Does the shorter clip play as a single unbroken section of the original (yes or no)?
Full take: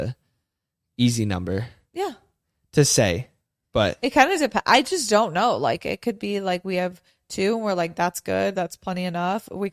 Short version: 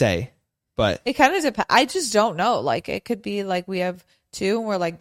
yes